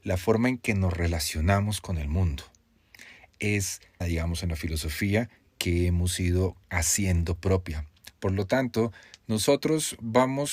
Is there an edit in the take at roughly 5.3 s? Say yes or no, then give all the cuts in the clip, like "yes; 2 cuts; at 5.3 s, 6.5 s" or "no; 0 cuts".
no; 3 cuts; at 4.0 s, 6.6 s, 8.1 s